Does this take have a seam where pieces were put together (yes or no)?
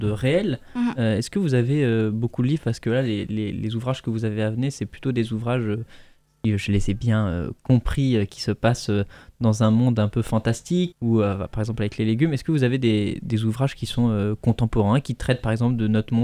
yes